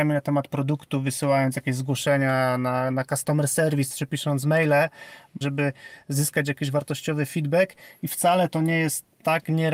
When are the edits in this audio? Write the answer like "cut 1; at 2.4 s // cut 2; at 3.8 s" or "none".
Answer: cut 1; at 5.4 s